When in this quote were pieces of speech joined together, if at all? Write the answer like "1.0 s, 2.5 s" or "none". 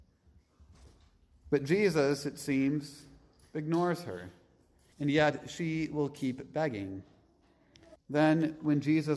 4.9 s, 8.0 s

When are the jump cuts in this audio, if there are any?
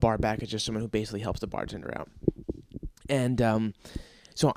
none

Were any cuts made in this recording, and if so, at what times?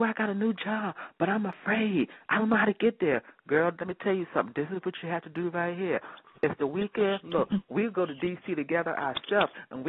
none

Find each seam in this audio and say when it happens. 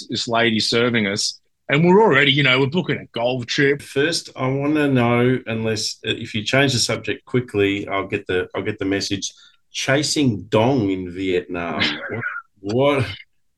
3.8 s

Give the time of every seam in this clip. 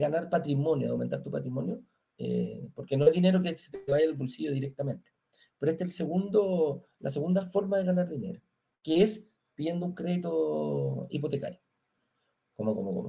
none

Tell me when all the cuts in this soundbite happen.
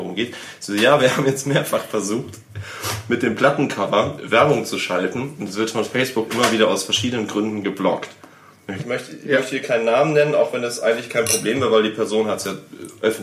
8.8 s

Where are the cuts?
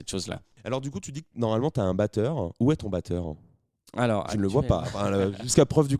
none

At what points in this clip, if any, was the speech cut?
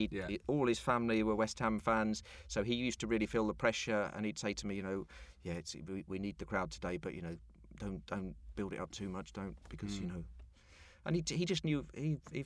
none

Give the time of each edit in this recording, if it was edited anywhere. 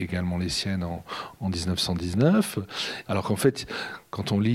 3.1 s

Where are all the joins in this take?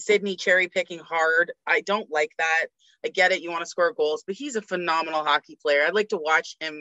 none

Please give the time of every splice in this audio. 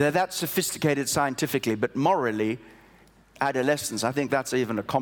none

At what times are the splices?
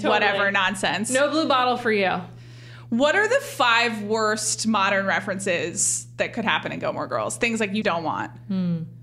7.8 s

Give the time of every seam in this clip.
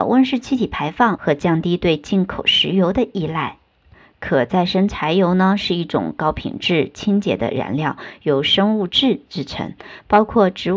none

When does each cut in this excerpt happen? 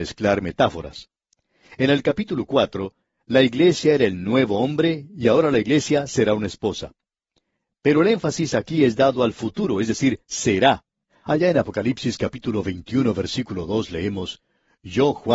11.1 s

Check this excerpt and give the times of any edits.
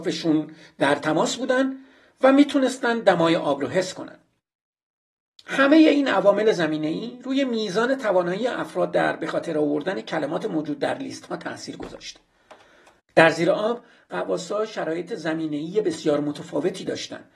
13.0 s

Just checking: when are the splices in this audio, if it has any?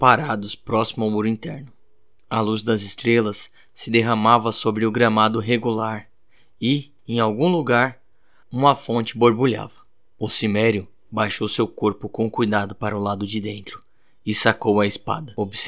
none

